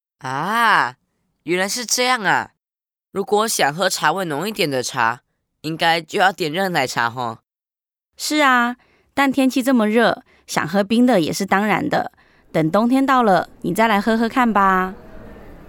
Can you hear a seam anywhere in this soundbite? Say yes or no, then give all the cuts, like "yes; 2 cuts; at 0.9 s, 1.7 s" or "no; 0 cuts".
no; 0 cuts